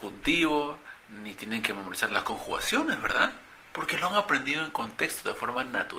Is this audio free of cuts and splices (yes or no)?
yes